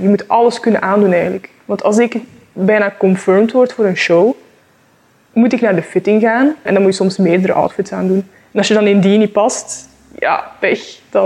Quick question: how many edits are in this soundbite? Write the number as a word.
one